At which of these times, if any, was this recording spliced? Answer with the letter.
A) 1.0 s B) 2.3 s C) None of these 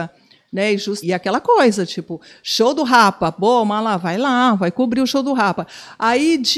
A